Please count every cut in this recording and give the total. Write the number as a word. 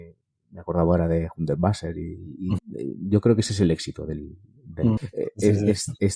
two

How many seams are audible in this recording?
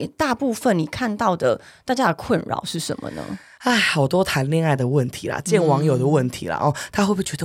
zero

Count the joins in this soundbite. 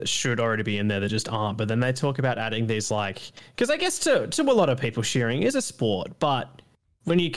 zero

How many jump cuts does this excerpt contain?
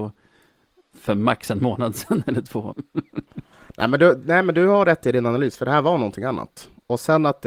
one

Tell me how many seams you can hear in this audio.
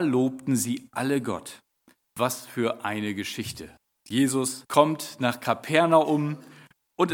two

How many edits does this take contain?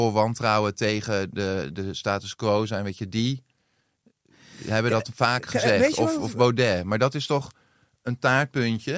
zero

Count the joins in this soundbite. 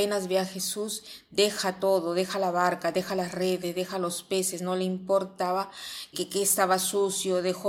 one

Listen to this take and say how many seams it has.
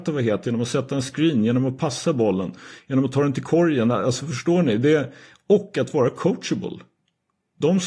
zero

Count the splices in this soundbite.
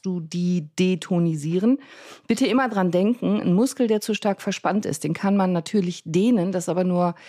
zero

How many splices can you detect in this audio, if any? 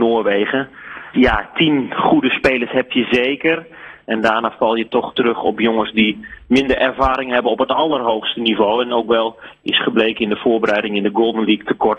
one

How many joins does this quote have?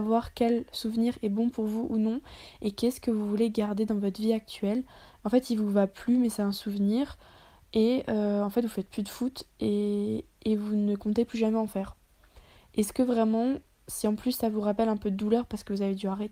one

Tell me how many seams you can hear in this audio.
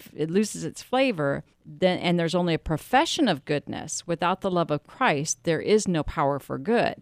one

